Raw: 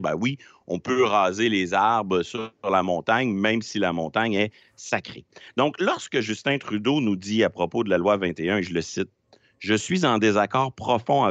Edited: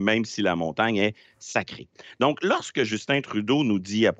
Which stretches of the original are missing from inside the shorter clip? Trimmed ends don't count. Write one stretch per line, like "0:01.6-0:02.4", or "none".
none